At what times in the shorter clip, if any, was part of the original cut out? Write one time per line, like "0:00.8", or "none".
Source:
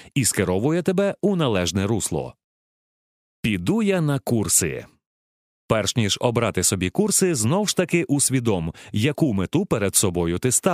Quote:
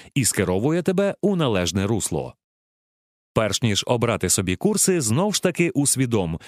0:03.2